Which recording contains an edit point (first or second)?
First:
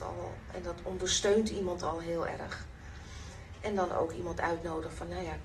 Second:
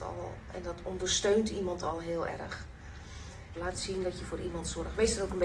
second